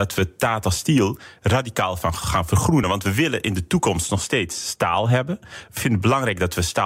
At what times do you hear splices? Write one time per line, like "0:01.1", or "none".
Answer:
none